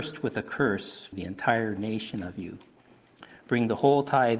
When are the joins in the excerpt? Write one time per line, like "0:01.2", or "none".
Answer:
0:01.1

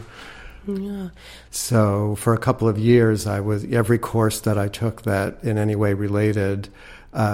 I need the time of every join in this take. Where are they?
0:01.4

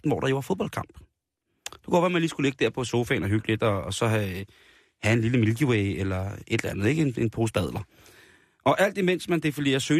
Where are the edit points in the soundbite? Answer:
none

